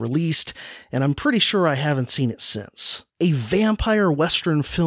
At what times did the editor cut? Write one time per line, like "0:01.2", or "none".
0:03.1